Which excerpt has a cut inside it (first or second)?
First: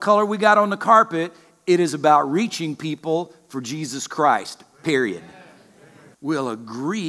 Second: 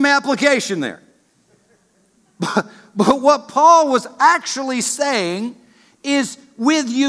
first